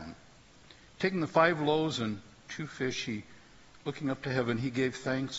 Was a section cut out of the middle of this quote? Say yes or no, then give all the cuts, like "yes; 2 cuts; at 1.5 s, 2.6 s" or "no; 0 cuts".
no; 0 cuts